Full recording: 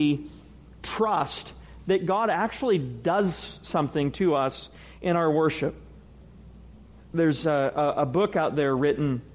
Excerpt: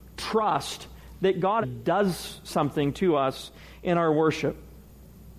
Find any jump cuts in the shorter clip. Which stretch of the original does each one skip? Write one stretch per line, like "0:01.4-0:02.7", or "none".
0:02.3-0:02.8

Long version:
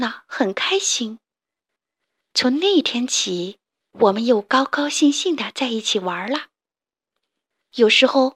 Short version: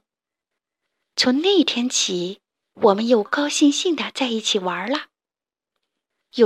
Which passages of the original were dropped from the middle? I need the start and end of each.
0:04.4-0:04.7

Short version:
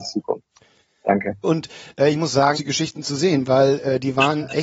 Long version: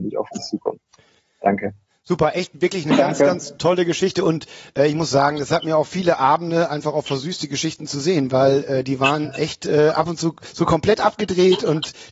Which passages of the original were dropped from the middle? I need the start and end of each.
0:01.8-0:04.2
0:05.3-0:07.4

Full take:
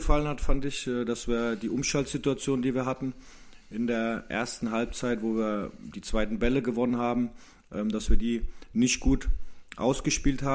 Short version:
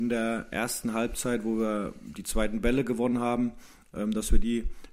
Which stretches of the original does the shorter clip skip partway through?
none

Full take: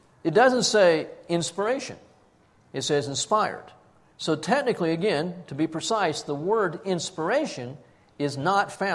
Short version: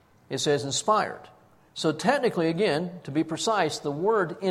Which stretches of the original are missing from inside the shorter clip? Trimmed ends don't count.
none

